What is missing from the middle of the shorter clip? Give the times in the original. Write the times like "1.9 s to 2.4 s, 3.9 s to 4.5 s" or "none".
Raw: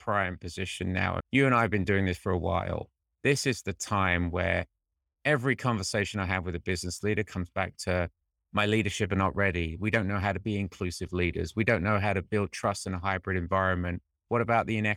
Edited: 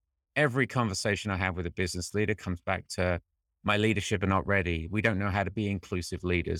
none